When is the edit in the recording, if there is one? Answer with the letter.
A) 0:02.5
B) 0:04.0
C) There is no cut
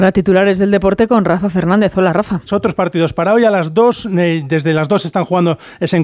A